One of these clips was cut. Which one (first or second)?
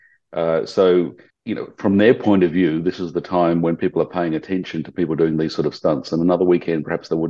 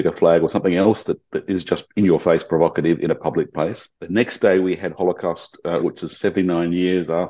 second